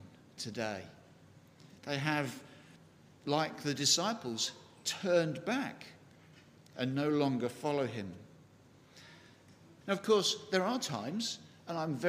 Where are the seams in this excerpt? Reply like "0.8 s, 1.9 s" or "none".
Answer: 1.8 s, 9.8 s